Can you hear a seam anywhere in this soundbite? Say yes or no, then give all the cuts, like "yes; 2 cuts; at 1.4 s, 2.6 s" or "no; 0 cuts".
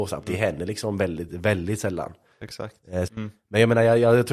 yes; 2 cuts; at 1.3 s, 3.1 s